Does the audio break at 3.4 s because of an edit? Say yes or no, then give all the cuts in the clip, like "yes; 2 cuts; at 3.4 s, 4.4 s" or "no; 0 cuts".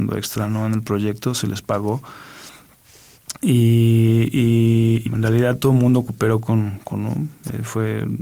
no; 2 cuts; at 5.0 s, 6.9 s